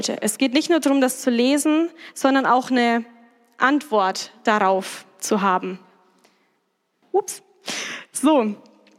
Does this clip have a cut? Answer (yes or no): yes